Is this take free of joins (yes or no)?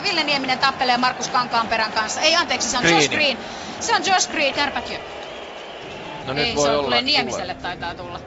no